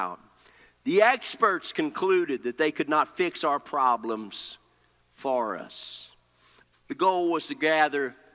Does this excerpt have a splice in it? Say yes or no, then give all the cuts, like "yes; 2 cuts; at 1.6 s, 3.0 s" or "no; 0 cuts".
yes; 1 cut; at 6.7 s